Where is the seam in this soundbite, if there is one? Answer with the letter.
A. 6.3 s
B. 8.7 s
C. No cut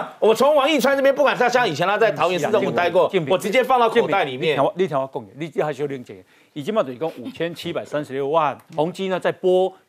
B